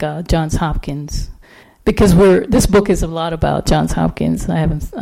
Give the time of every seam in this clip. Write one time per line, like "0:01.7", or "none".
0:01.6